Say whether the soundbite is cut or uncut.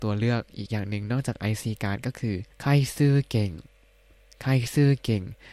cut